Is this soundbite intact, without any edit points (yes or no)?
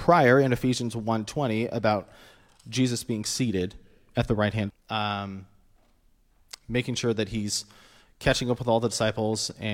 no